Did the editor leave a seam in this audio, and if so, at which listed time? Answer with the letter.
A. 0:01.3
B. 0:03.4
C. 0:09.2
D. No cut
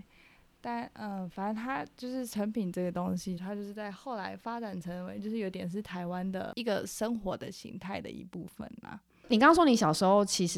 B